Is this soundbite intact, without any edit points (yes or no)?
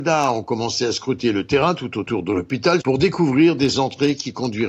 no